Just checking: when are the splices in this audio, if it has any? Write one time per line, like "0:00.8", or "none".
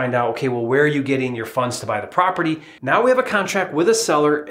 0:02.8